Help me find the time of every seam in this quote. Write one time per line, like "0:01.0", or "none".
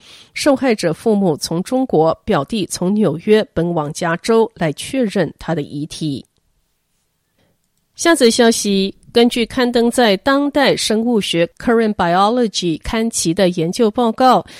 none